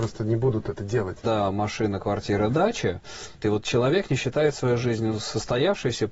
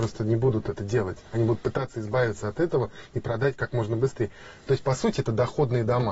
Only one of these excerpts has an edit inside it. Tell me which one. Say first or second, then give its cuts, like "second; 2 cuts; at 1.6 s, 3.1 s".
first; 2 cuts; at 1.2 s, 3.4 s